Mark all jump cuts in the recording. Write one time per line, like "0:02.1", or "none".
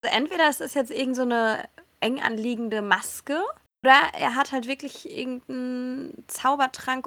none